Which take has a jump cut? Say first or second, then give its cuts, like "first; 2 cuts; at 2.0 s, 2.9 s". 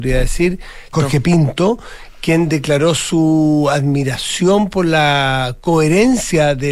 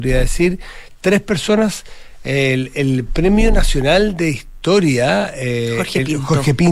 first; 1 cut; at 0.9 s